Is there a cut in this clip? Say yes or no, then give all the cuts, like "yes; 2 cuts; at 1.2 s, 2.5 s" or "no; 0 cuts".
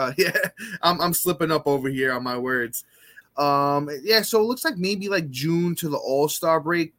yes; 1 cut; at 3.2 s